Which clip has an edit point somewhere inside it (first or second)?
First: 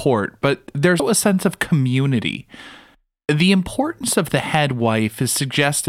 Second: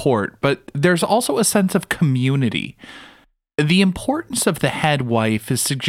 first